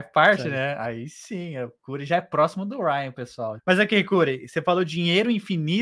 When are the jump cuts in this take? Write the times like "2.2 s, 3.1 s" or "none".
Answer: 3.6 s